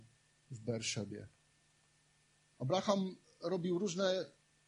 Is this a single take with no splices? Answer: yes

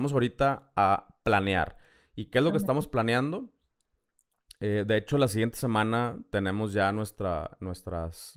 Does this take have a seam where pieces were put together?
no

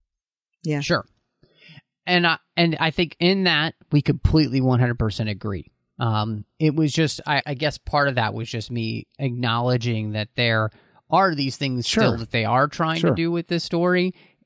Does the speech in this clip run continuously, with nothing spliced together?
no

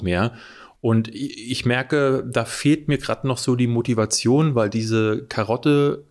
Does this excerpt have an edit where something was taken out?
no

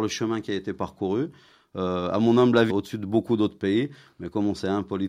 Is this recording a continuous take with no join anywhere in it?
no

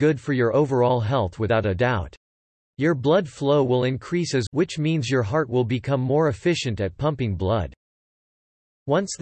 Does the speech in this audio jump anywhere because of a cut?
yes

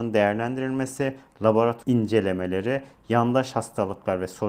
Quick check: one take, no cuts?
yes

